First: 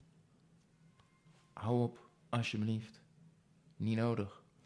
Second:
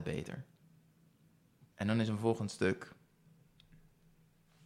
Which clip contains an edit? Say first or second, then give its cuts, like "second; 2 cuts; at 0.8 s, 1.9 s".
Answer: second; 1 cut; at 1.7 s